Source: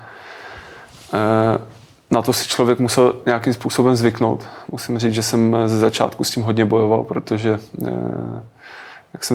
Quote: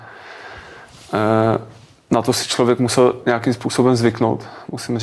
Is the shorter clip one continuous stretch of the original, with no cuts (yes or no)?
yes